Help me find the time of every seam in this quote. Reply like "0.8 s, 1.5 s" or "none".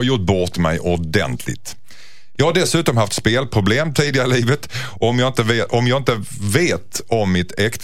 2.4 s